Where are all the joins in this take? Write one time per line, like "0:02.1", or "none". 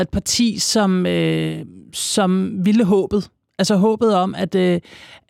none